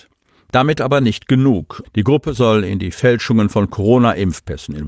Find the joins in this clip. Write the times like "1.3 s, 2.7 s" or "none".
1.8 s